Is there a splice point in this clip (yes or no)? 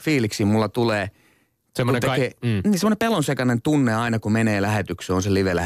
no